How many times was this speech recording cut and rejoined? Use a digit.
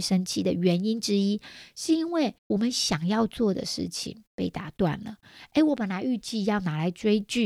1